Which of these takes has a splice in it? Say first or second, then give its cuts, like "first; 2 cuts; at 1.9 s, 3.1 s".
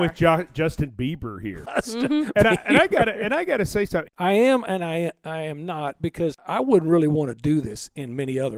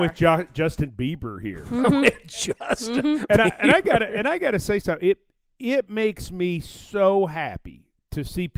first; 2 cuts; at 1.7 s, 4.1 s